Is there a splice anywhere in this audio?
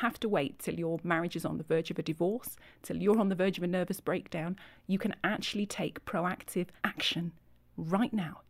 yes; 1 cut; at 6.8 s

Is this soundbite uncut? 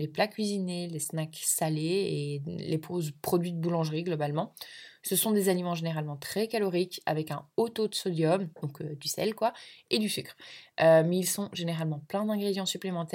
yes; 0 cuts

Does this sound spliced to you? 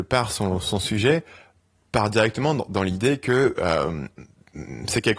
no; 0 cuts

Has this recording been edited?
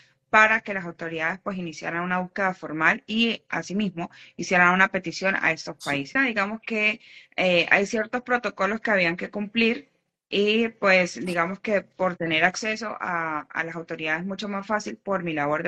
yes; 1 cut; at 6.2 s

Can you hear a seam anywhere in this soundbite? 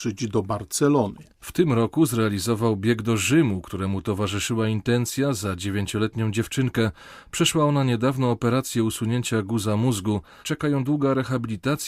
yes; 1 cut; at 10.4 s

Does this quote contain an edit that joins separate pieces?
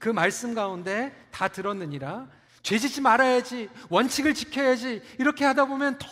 yes; 1 cut; at 2.5 s

